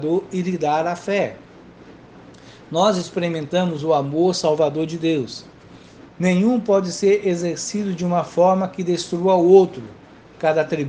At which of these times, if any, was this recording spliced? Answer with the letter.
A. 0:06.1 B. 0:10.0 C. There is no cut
A